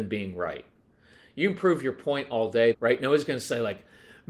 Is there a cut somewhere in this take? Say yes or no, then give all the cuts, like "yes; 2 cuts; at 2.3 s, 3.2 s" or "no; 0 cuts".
yes; 1 cut; at 2.7 s